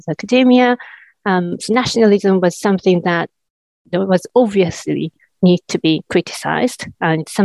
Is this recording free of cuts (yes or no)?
yes